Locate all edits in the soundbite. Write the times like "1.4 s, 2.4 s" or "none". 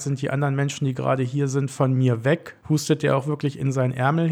none